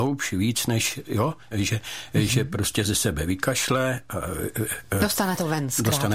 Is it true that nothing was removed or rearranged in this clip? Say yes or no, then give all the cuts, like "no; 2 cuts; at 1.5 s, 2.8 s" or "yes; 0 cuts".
no; 1 cut; at 1.5 s